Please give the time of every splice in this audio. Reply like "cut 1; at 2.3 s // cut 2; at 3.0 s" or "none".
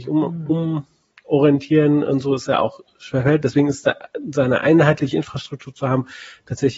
none